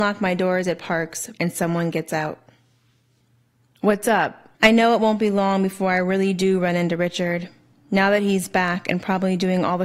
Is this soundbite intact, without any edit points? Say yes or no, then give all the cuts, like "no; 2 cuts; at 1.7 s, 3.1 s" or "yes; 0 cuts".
no; 2 cuts; at 1.3 s, 4.5 s